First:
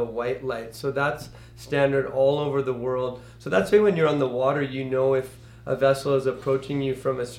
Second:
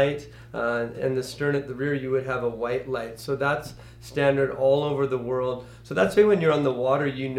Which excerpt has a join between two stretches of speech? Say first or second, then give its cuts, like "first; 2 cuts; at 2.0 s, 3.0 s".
second; 1 cut; at 0.9 s